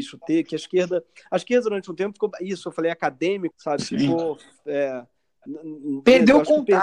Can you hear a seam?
yes; 1 cut; at 3.5 s

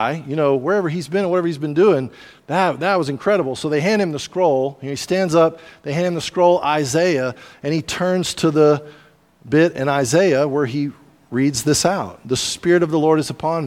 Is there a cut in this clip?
no; 0 cuts

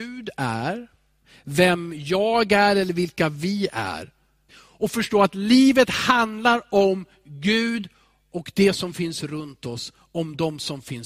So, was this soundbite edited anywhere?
yes; 1 cut; at 4.5 s

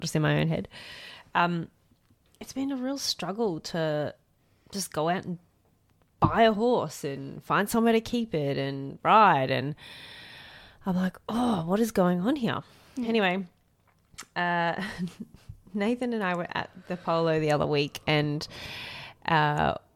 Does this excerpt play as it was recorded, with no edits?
yes; 0 cuts

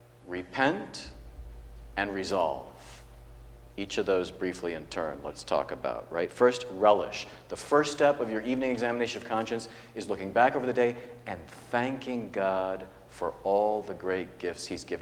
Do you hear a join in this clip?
no; 0 cuts

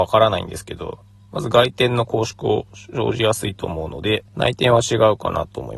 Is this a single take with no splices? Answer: no; 1 cut; at 4.3 s

